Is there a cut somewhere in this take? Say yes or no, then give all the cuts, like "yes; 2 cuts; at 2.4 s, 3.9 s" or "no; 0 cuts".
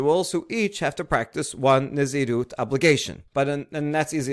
yes; 1 cut; at 3.3 s